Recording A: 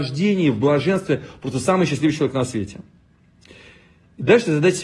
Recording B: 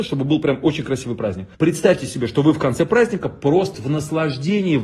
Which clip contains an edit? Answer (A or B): B